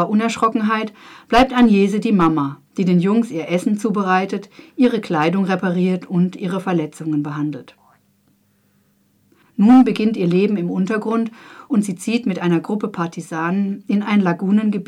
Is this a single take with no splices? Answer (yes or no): no